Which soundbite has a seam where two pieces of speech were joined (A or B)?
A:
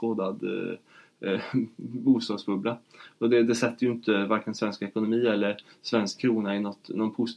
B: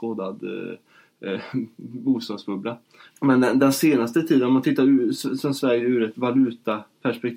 B